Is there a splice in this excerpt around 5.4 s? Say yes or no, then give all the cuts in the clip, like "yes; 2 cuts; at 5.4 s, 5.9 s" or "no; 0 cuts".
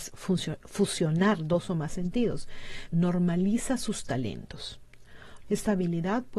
yes; 2 cuts; at 2.9 s, 5.4 s